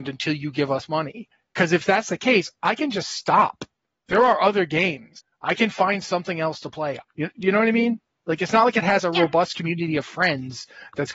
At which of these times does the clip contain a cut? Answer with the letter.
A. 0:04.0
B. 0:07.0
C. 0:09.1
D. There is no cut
B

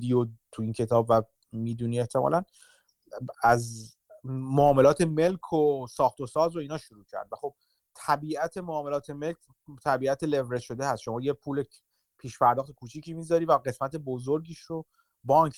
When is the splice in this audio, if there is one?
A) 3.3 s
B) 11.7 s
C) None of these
A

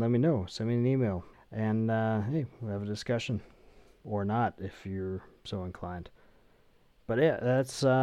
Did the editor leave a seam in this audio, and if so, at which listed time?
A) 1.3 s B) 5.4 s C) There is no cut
A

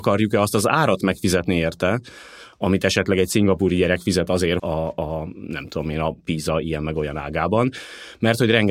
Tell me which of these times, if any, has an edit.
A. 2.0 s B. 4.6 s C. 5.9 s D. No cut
B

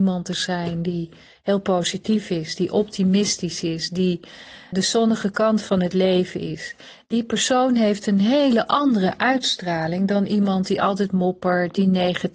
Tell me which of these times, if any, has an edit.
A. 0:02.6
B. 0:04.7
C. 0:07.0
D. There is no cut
B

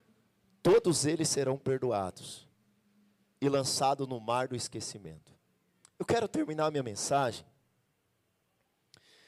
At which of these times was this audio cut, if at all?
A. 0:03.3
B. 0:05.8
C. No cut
B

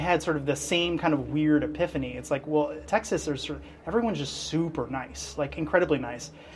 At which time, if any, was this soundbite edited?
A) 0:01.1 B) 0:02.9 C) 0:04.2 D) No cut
D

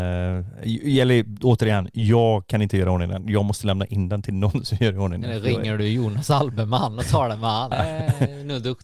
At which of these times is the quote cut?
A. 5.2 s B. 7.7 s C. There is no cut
B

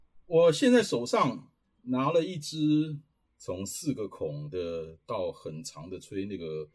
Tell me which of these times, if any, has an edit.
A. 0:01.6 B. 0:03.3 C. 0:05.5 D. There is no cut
B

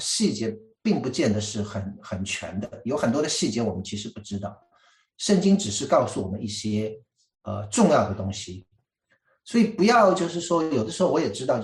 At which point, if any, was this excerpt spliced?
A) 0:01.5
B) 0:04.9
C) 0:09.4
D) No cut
D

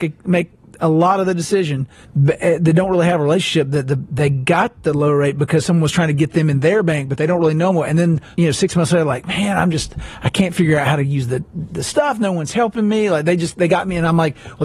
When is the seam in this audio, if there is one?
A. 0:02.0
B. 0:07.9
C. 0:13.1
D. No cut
A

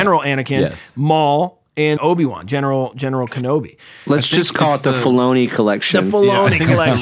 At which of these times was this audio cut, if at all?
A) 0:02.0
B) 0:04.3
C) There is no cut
A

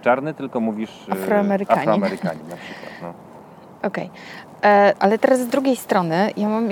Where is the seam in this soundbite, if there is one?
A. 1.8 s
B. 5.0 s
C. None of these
B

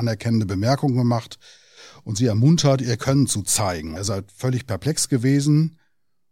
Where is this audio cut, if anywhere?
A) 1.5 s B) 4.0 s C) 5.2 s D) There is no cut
B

